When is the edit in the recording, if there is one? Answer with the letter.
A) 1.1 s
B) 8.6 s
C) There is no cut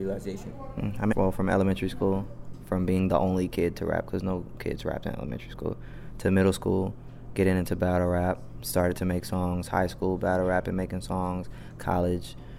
A